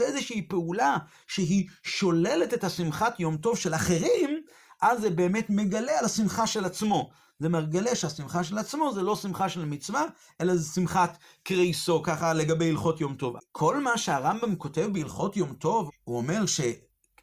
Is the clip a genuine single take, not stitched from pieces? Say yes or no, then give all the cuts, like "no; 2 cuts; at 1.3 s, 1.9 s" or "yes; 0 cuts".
no; 2 cuts; at 13.4 s, 15.9 s